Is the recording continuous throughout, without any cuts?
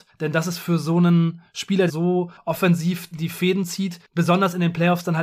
no; 2 cuts; at 1.9 s, 3.1 s

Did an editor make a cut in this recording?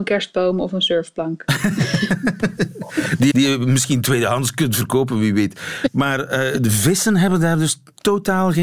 yes; 1 cut; at 3.3 s

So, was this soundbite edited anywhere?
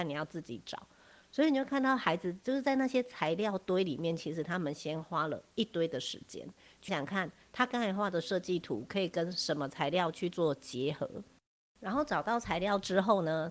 yes; 1 cut; at 6.9 s

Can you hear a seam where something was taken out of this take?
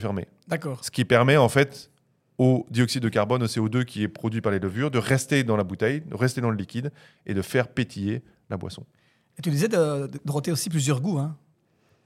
no; 0 cuts

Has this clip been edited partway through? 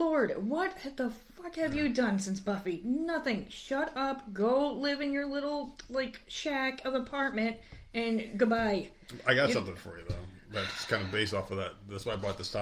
no; 0 cuts

